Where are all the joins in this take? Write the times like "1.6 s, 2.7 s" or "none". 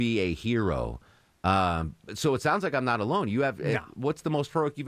none